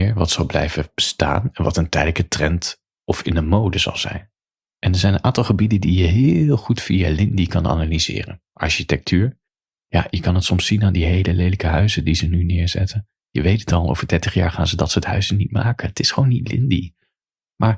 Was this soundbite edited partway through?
no; 0 cuts

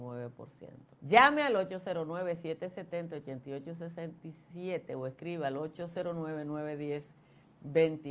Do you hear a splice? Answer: yes; 1 cut; at 1.0 s

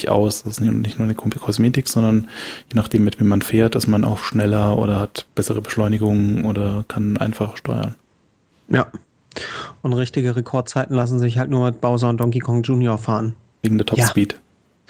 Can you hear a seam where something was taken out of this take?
yes; 1 cut; at 13.5 s

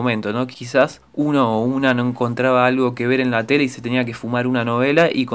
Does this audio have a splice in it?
no; 0 cuts

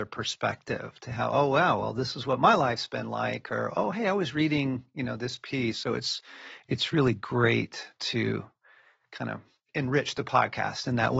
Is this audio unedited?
yes; 0 cuts

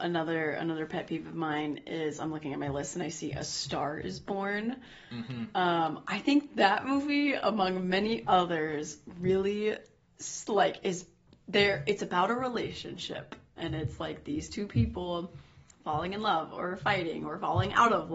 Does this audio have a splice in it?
no; 0 cuts

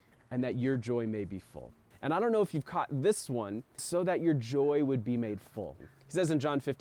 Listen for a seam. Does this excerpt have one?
yes; 3 cuts; at 1.9 s, 3.8 s, 5.8 s

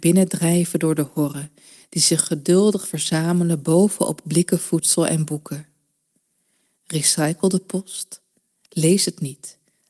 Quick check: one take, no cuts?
yes; 0 cuts

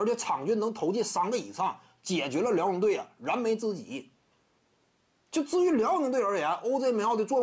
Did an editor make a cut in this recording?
no; 0 cuts

